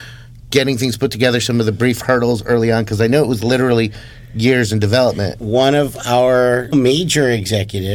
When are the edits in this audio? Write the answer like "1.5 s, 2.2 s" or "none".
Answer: 5.4 s, 6.7 s